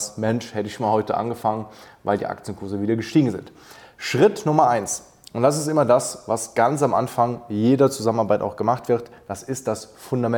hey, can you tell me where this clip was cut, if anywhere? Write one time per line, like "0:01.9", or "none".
none